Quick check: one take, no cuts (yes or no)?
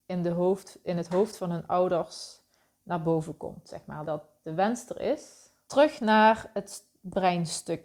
no